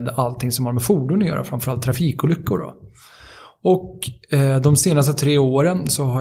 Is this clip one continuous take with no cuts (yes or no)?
yes